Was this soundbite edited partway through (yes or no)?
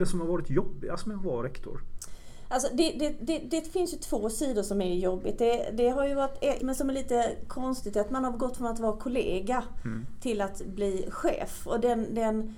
yes